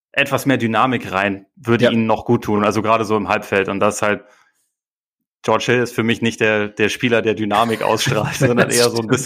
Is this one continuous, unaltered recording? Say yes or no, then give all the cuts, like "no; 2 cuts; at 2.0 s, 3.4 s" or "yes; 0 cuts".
yes; 0 cuts